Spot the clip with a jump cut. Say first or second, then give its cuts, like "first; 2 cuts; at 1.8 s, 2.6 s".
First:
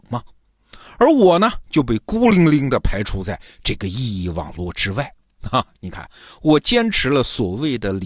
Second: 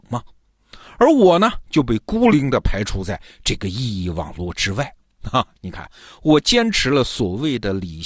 second; 1 cut; at 2.3 s